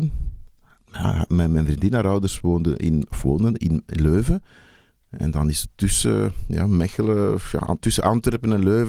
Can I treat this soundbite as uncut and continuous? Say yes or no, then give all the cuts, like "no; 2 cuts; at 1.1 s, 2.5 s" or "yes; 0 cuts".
yes; 0 cuts